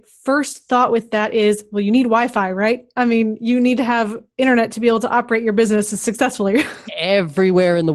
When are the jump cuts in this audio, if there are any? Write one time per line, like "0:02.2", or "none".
none